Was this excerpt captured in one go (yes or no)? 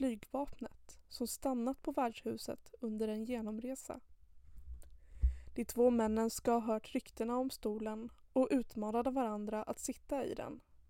yes